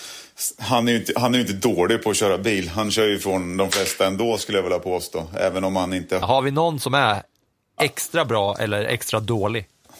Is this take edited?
yes; 1 cut; at 6.2 s

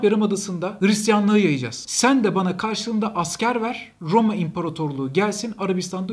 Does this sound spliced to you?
yes; 1 cut; at 1.8 s

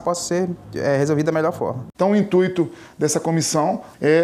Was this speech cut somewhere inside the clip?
yes; 1 cut; at 1.9 s

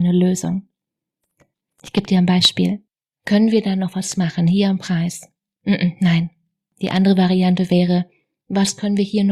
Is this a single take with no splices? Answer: yes; 0 cuts

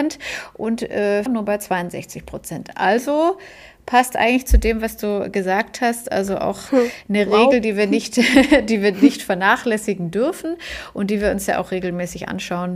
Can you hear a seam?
yes; 1 cut; at 1.3 s

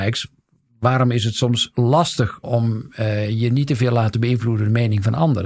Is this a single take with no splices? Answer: no; 1 cut; at 2.4 s

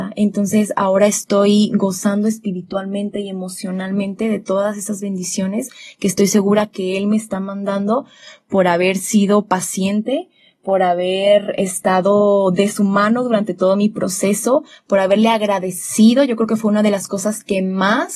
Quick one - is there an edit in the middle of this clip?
no; 0 cuts

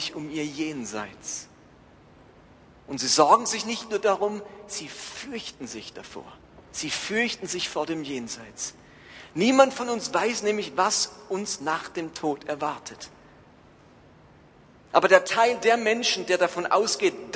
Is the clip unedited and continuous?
yes; 0 cuts

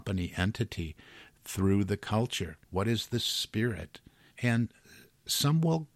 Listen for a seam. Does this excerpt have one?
yes; 2 cuts; at 2.6 s, 4.3 s

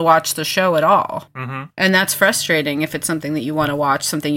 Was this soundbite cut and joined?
no; 0 cuts

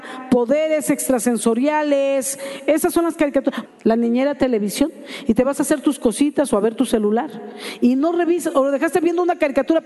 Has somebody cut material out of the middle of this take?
yes; 1 cut; at 3.6 s

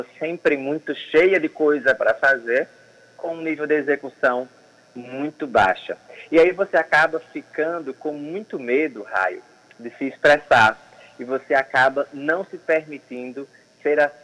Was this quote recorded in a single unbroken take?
yes; 0 cuts

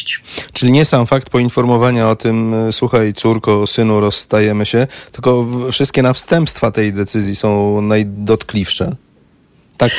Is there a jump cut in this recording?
no; 0 cuts

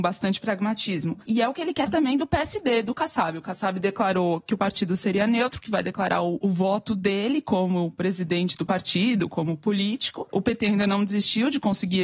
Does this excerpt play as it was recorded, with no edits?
yes; 0 cuts

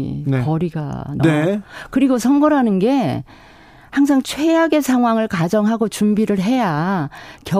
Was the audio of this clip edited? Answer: yes; 1 cut; at 1.2 s

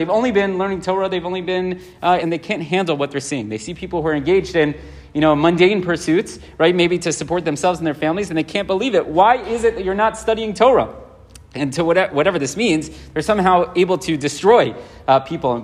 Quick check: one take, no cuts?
no; 1 cut; at 2.2 s

